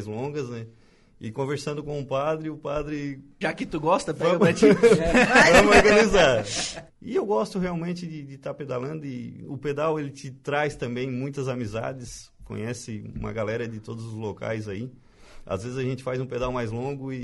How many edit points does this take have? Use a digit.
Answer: 2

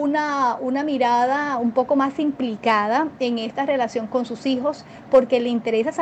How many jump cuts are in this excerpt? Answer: 1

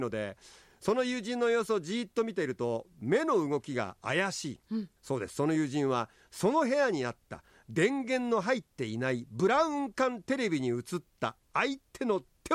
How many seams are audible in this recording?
1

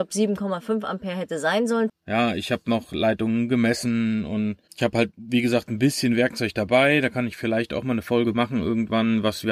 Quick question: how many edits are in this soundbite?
1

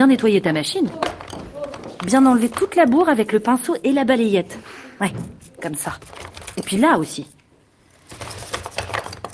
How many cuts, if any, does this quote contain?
0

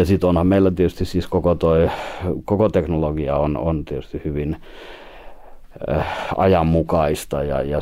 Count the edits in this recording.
0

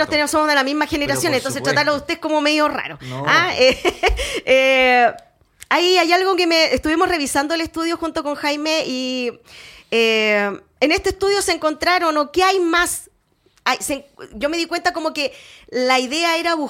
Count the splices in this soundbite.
0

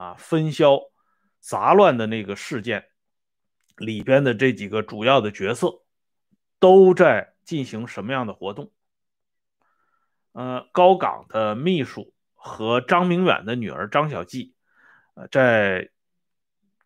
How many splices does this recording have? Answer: 1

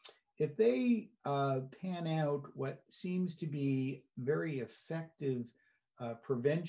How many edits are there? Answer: 0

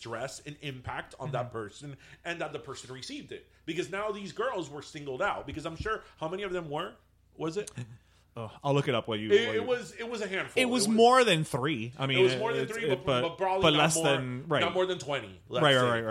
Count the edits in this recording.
0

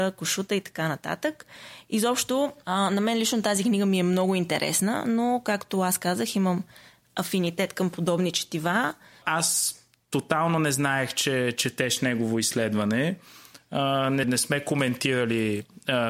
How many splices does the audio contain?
2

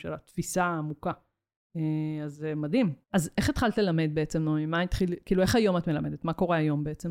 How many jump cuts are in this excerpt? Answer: 1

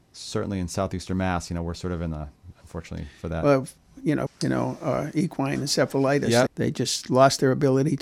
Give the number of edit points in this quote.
3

